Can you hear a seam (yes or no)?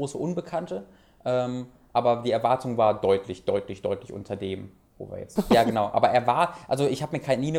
yes